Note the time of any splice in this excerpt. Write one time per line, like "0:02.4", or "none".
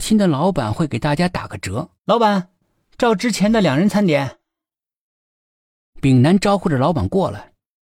0:02.0